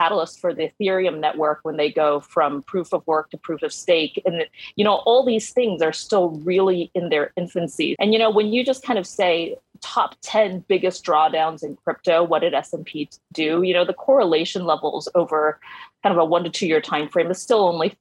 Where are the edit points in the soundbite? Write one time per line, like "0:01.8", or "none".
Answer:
0:08.0

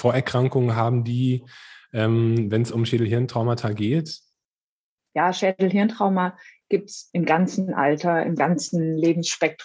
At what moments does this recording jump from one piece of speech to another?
none

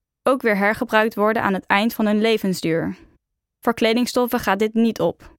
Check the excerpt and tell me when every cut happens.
none

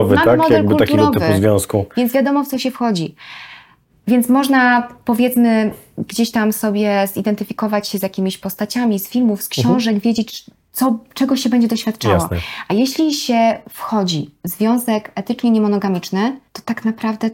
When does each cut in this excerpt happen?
none

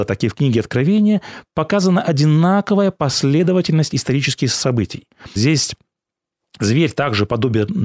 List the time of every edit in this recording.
0:05.4

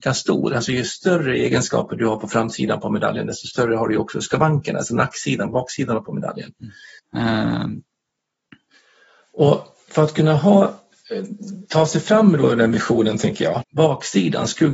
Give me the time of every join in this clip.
0:07.0
0:13.6

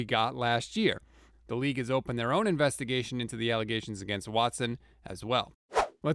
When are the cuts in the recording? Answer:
0:01.3

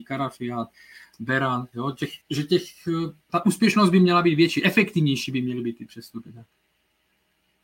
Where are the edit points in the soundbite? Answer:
0:02.2

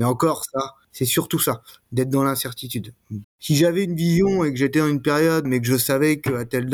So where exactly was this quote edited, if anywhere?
0:00.9
0:03.2
0:05.4

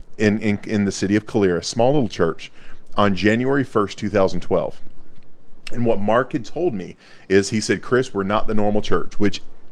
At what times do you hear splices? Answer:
none

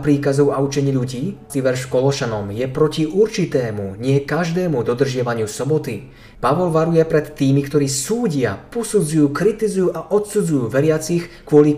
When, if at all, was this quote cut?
0:01.5
0:06.3

